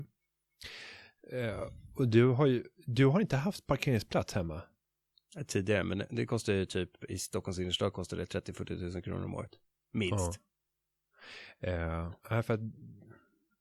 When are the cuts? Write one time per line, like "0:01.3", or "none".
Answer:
0:12.2